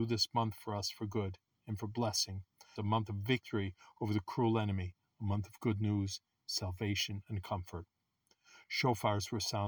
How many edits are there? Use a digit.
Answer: 1